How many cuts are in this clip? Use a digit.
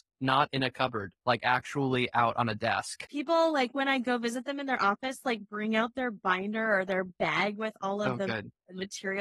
1